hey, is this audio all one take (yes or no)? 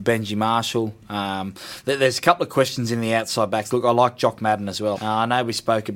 no